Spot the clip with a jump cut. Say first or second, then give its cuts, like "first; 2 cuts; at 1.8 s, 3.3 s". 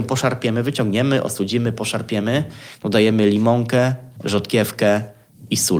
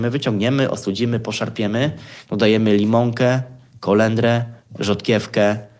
first; 1 cut; at 4.2 s